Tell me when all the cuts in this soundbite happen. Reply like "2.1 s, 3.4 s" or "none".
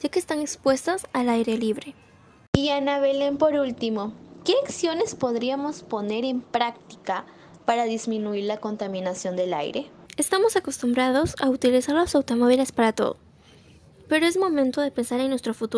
10.1 s